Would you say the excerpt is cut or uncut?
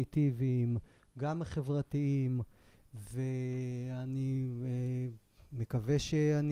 uncut